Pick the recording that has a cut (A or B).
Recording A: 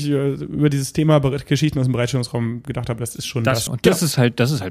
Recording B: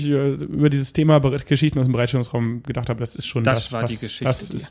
A